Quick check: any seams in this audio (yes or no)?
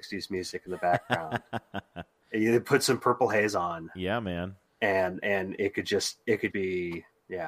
yes